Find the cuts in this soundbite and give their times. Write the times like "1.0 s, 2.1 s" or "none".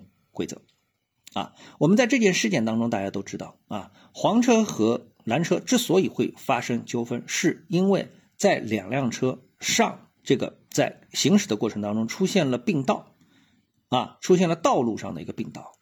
10.2 s